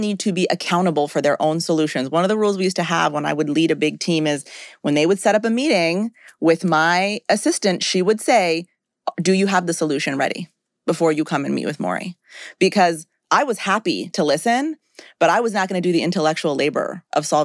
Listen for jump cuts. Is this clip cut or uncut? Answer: uncut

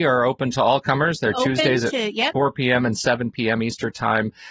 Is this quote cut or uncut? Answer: uncut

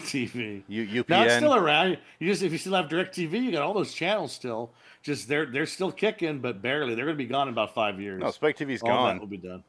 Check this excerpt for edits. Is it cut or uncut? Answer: uncut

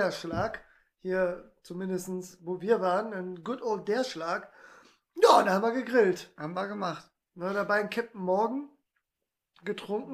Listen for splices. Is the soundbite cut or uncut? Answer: uncut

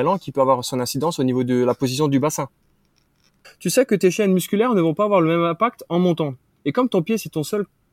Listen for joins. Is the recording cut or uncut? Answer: cut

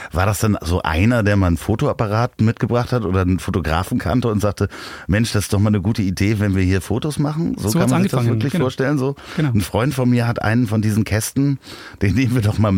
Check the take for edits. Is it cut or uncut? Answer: uncut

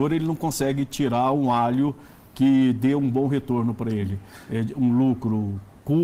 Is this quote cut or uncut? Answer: uncut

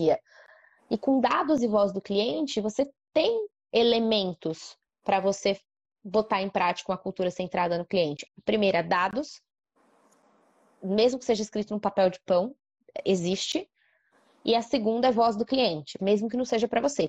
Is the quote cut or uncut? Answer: cut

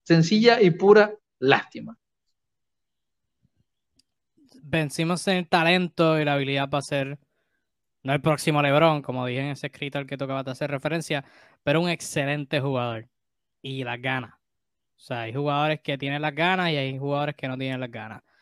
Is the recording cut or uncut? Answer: uncut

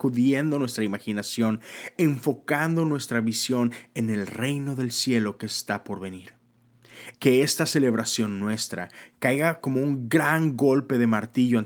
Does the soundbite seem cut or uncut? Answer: cut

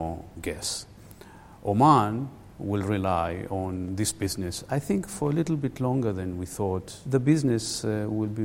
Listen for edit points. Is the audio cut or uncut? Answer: uncut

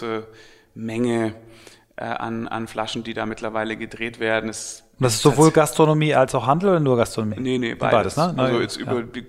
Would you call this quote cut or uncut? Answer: uncut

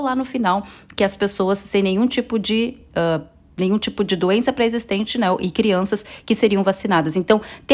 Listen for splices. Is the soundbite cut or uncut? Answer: uncut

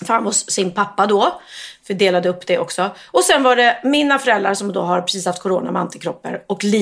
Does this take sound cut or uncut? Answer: uncut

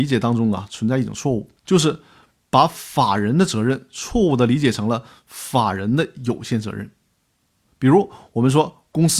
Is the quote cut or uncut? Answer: cut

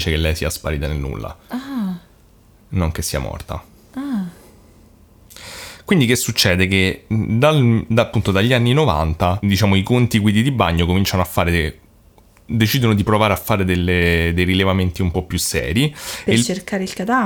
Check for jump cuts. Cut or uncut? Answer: uncut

